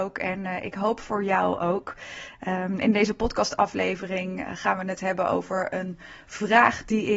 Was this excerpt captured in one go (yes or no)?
yes